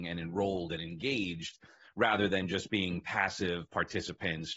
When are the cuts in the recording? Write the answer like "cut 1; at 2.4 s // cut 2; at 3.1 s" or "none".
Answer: none